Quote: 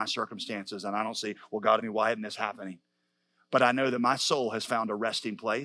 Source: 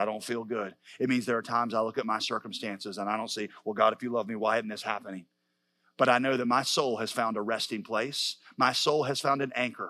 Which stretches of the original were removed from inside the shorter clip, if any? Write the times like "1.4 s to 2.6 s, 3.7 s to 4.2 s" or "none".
3.9 s to 4.3 s